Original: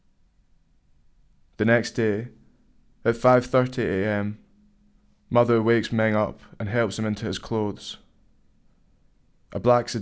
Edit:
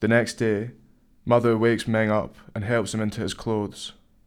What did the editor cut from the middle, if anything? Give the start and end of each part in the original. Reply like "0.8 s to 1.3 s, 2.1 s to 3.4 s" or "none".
2.8 s to 5.2 s

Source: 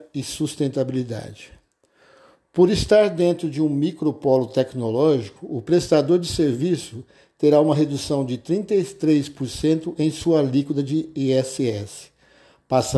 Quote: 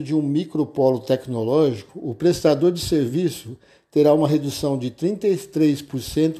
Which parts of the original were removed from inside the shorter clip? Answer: none

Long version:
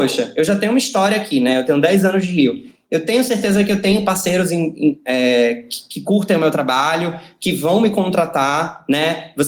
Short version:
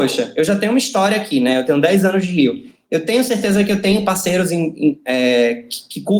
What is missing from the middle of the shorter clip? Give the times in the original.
none

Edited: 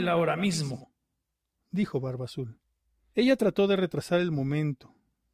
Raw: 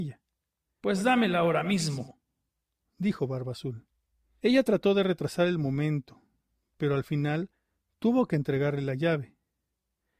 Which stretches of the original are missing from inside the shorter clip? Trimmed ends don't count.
none

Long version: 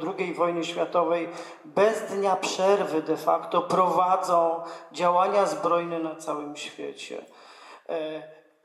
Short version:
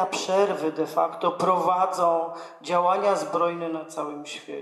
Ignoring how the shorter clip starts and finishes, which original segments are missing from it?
none

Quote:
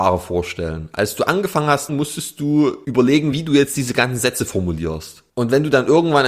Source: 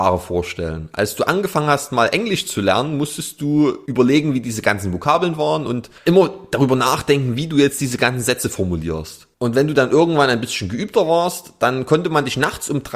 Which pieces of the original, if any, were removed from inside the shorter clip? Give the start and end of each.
1.9 s to 2.9 s, 4.3 s to 7.4 s

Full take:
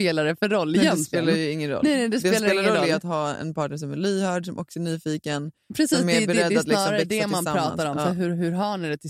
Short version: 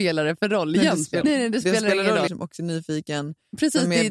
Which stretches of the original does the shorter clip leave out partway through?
1.2 s to 1.8 s, 2.9 s to 4.4 s

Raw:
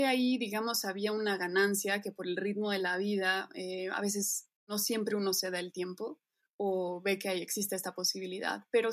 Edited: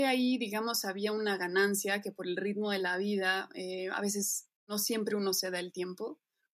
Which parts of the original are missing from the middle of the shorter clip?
none

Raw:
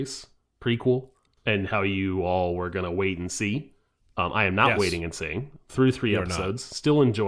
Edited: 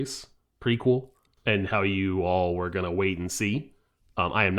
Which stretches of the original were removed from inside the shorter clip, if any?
none

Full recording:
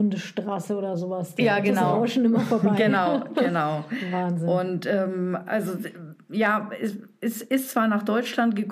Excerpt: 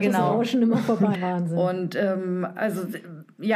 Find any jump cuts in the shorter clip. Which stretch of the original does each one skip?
2.8 s to 4.0 s

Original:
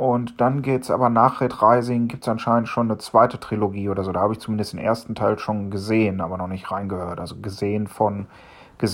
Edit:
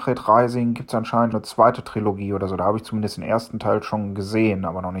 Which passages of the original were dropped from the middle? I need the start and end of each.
2.7 s to 2.9 s

